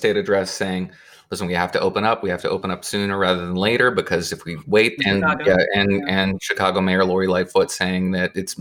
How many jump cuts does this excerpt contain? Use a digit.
1